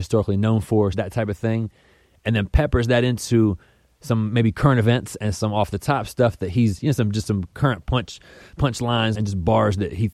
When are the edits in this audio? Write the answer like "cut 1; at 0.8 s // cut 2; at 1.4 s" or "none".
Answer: cut 1; at 0.9 s // cut 2; at 9.1 s